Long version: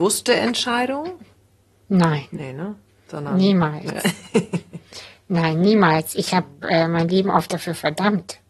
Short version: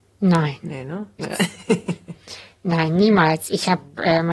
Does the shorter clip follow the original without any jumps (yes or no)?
no